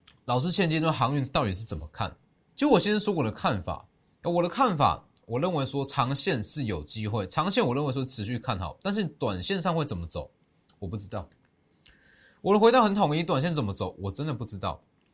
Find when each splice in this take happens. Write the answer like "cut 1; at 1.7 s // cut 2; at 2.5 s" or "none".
cut 1; at 2.5 s